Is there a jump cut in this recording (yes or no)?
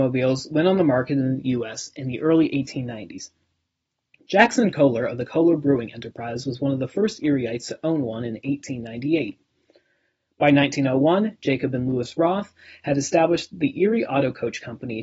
no